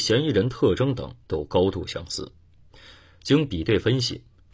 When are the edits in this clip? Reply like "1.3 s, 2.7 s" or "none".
none